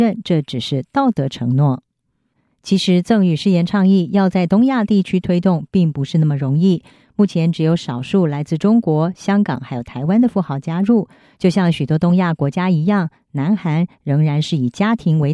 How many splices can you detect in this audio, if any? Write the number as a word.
one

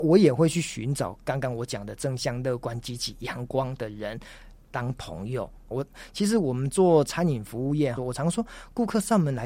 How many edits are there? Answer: two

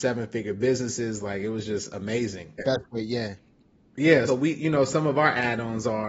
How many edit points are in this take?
two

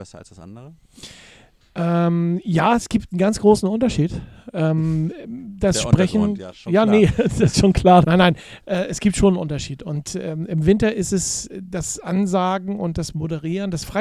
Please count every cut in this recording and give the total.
one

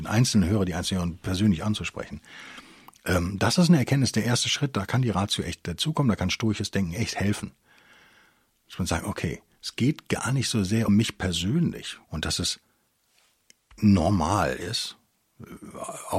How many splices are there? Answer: two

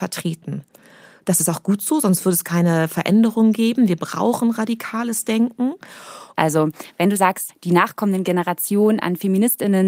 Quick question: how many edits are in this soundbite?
two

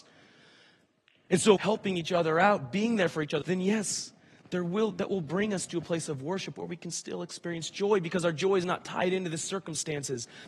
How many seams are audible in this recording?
two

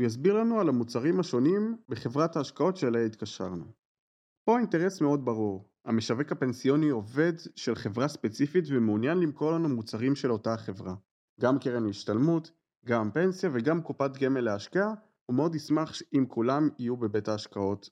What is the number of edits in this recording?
one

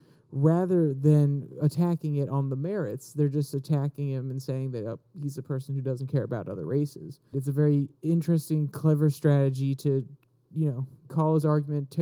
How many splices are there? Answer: two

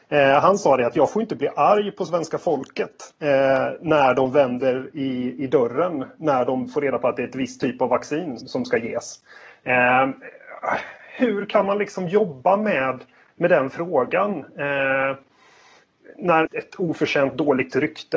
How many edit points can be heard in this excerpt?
two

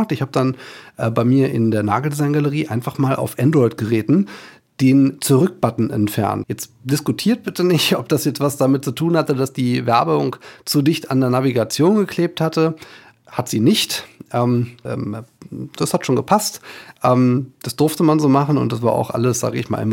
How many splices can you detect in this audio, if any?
two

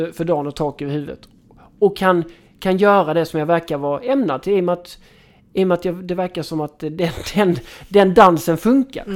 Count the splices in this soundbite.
zero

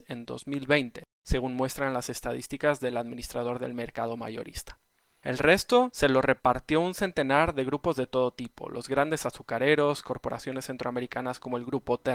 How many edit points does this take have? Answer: zero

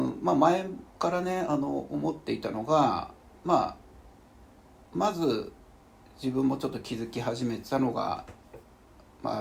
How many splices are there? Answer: zero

